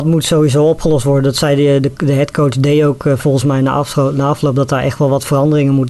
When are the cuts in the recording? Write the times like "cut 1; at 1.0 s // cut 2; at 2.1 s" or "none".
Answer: none